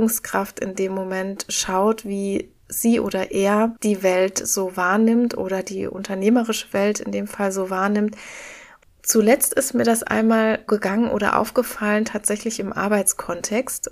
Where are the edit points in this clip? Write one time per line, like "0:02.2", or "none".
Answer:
0:08.8
0:10.7